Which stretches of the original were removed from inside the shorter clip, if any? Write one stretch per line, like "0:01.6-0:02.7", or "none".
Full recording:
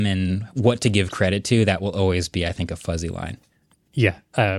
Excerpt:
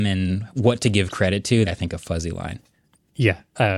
0:01.7-0:02.4